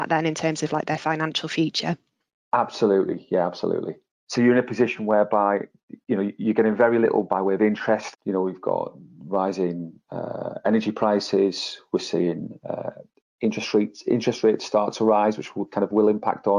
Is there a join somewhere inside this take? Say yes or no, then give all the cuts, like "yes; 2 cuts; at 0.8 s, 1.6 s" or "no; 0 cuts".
yes; 2 cuts; at 4.1 s, 8.1 s